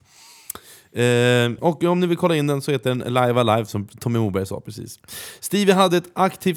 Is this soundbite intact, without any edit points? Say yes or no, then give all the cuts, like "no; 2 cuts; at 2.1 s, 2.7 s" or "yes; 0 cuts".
no; 1 cut; at 1.6 s